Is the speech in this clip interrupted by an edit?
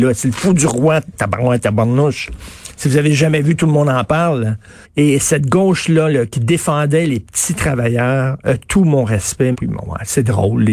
yes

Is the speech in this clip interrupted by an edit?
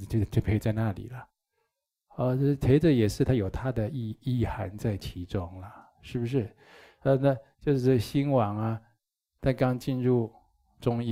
no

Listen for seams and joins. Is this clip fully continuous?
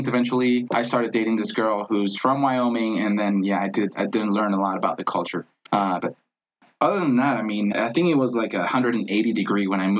no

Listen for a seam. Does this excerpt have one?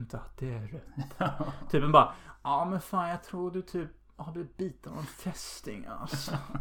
no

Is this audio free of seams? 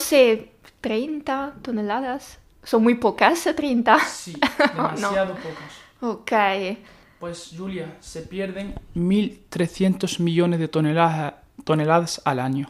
yes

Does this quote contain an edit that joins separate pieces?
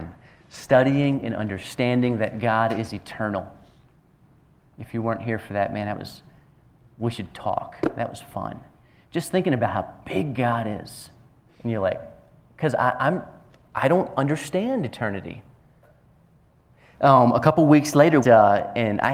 yes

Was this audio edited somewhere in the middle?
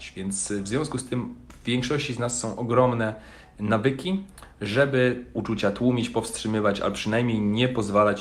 no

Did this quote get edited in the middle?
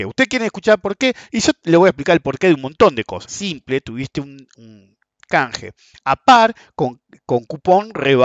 yes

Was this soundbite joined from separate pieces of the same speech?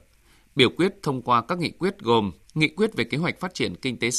yes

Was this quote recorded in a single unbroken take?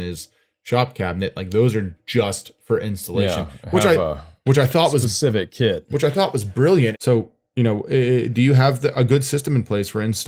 no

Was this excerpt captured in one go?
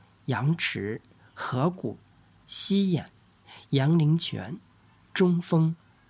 yes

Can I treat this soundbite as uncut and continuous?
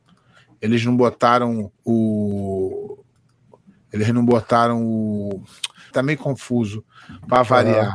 no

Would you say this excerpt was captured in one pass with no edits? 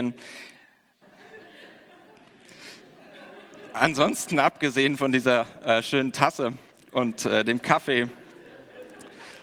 no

